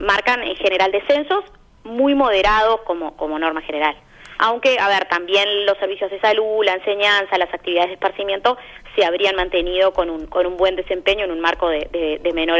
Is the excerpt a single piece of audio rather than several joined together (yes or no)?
no